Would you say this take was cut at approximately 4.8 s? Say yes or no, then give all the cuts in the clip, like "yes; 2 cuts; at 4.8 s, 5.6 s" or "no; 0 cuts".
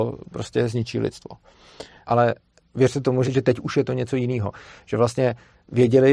no; 2 cuts; at 2.0 s, 3.2 s